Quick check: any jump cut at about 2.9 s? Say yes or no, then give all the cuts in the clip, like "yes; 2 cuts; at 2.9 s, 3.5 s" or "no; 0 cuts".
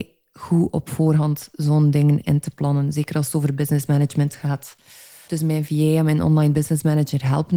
no; 1 cut; at 5.3 s